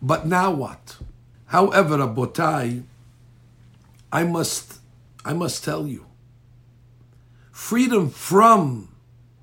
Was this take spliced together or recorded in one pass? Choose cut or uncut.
cut